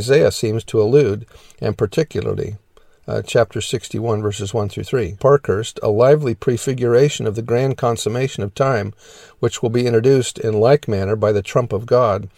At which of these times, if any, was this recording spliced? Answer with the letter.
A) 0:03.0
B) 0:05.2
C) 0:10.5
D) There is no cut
B